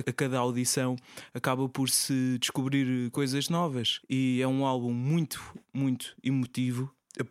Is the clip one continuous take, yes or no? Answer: yes